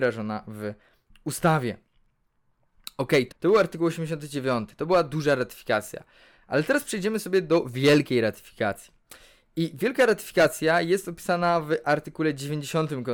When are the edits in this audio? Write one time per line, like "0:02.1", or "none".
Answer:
0:03.3